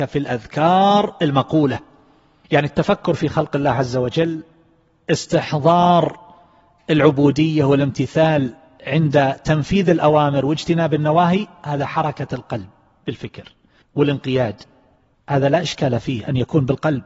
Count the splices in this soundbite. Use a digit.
0